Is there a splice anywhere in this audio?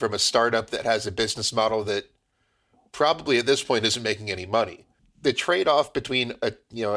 yes; 1 cut; at 5.0 s

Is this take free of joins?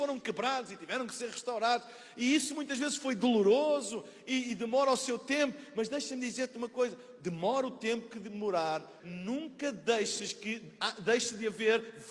no; 1 cut; at 9.0 s

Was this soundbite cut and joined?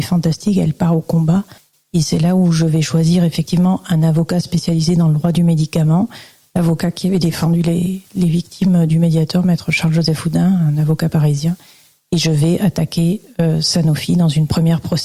yes; 1 cut; at 1.7 s

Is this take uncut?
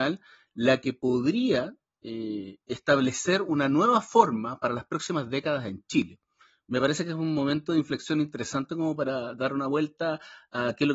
yes; 0 cuts

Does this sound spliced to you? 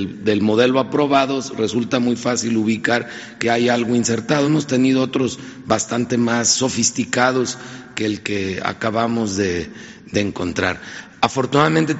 no; 0 cuts

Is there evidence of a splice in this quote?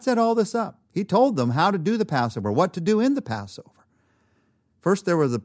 no; 0 cuts

